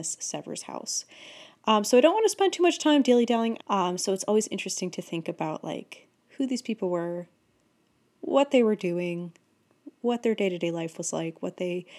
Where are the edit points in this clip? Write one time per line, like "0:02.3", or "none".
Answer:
0:03.6